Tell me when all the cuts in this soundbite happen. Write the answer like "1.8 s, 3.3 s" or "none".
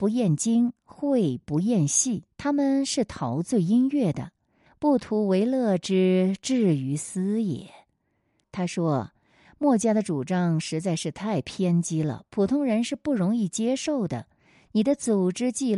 2.3 s, 4.7 s, 8.4 s